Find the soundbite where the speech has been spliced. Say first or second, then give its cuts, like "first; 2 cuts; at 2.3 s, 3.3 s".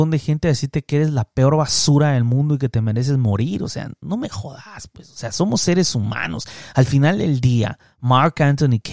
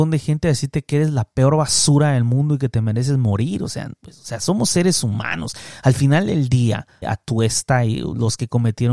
second; 2 cuts; at 4.0 s, 7.0 s